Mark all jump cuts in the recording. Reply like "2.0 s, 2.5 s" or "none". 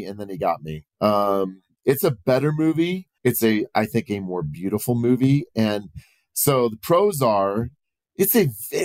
0.9 s, 3.2 s